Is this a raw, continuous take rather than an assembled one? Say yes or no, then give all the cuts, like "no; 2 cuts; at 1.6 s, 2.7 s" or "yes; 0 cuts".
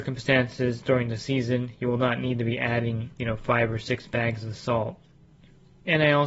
yes; 0 cuts